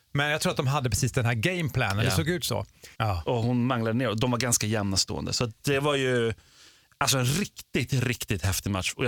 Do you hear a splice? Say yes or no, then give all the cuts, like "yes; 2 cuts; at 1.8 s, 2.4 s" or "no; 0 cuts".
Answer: yes; 1 cut; at 2.9 s